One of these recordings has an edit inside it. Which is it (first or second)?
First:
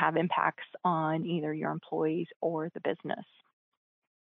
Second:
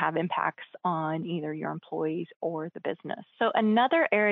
second